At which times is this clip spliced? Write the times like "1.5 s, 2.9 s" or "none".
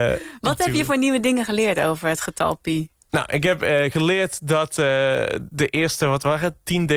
none